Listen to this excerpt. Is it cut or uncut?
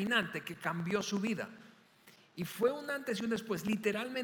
uncut